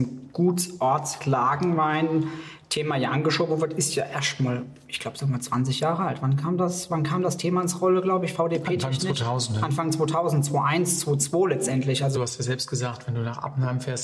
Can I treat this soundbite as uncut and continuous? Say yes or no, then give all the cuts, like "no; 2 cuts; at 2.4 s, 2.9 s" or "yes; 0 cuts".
yes; 0 cuts